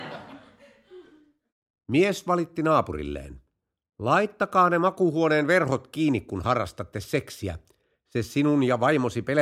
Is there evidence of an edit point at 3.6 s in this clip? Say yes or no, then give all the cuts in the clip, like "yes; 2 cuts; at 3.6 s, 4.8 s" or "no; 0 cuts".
no; 0 cuts